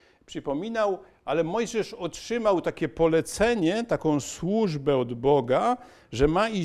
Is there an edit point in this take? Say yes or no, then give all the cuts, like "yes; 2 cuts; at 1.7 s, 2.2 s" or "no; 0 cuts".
no; 0 cuts